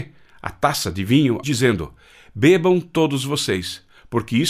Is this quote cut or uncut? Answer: cut